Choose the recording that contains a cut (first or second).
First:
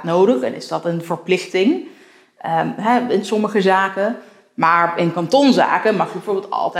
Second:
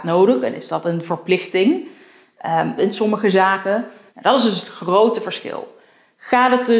second